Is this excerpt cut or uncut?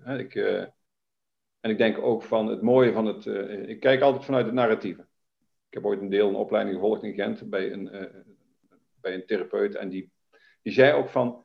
uncut